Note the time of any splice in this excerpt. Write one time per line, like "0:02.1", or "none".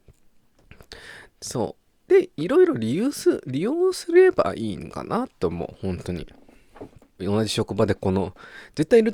0:01.3
0:07.2